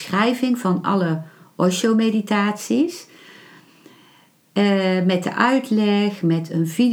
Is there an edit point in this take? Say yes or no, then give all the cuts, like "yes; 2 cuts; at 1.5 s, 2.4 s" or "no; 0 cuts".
no; 0 cuts